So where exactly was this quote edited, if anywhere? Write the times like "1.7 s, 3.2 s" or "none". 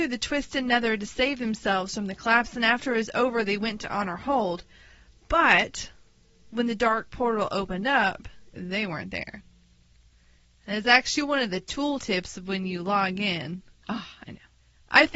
8.5 s, 13.8 s